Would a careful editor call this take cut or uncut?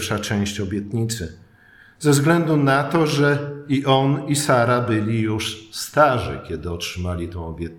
uncut